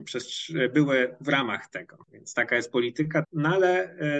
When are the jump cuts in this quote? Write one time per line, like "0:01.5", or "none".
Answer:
0:02.1
0:03.2

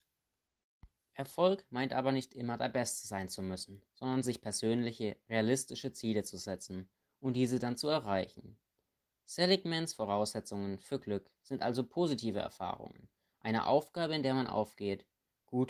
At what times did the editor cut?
none

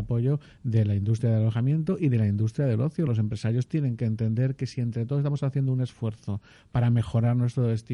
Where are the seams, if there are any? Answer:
none

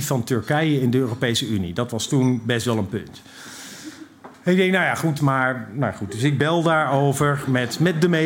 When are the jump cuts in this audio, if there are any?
0:05.2

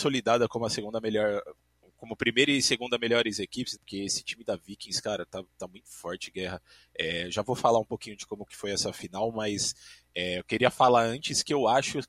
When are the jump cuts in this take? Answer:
0:03.8

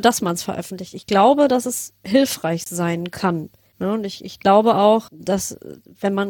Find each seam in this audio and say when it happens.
0:03.7
0:05.1

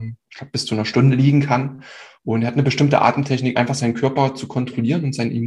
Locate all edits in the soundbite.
0:03.5

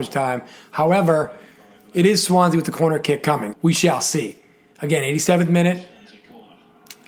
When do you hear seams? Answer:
0:03.5

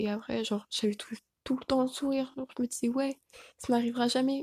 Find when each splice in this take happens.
none

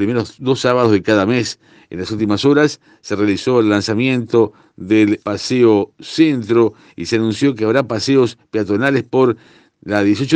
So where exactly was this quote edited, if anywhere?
0:05.2

